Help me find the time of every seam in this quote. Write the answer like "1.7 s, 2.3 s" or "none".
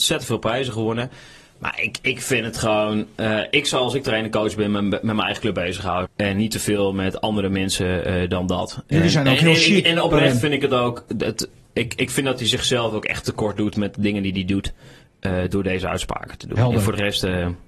6.0 s